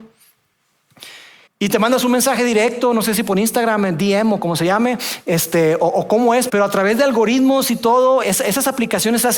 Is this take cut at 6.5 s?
yes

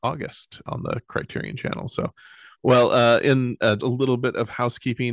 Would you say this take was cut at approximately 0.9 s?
no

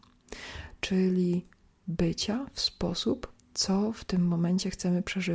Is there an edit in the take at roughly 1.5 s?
no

